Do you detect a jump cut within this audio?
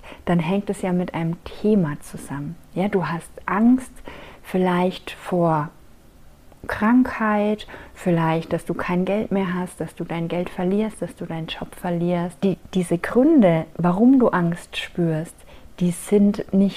yes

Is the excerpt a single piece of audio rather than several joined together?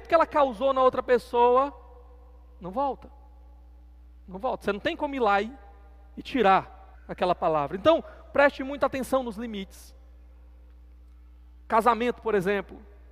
no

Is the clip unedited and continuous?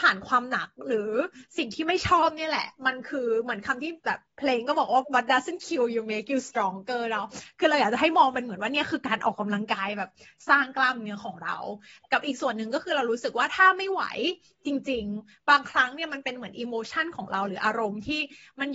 no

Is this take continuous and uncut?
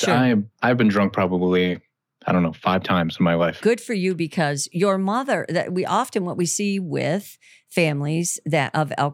no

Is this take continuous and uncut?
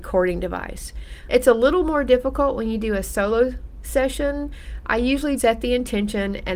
no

